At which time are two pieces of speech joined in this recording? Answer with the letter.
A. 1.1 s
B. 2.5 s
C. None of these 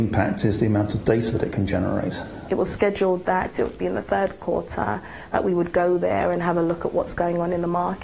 B